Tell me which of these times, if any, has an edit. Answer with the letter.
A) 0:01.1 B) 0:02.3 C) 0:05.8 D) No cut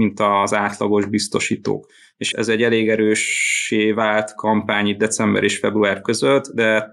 B